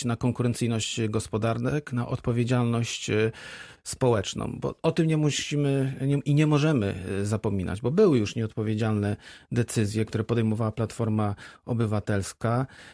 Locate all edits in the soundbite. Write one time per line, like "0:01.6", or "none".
none